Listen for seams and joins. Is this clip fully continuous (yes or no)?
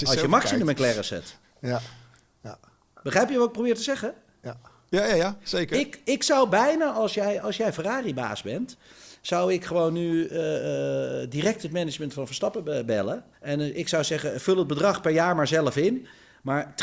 no